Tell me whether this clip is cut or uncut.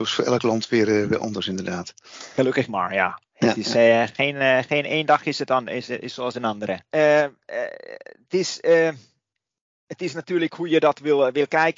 cut